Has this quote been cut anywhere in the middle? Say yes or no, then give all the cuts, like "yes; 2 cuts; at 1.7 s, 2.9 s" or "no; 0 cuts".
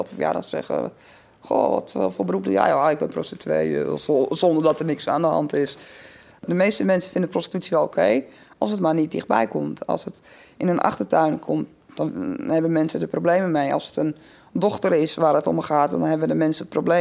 yes; 1 cut; at 2.1 s